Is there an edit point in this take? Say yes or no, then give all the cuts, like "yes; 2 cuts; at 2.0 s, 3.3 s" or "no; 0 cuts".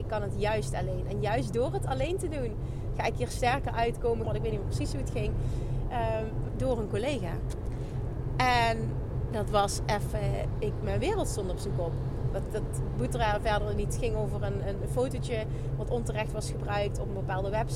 yes; 2 cuts; at 4.2 s, 6.5 s